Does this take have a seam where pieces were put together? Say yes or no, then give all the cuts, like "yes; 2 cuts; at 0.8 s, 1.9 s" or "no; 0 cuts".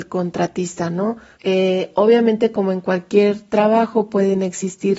yes; 1 cut; at 1.3 s